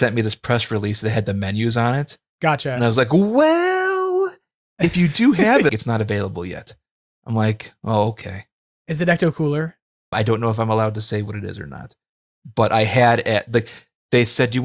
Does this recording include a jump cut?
yes; 2 cuts; at 5.7 s, 10.1 s

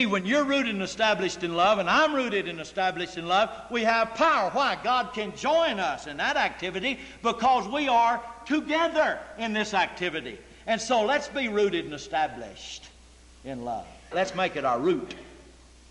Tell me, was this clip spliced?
yes; 1 cut; at 14.1 s

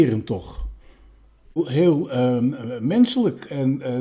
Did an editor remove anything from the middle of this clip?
yes; 1 cut; at 1.4 s

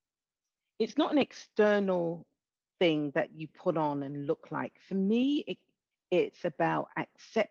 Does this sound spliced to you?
yes; 1 cut; at 5.9 s

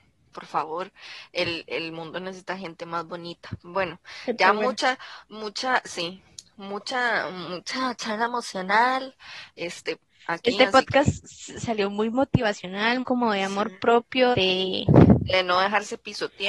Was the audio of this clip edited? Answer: yes; 2 cuts; at 13.0 s, 14.3 s

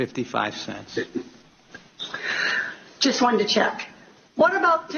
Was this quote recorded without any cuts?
yes; 0 cuts

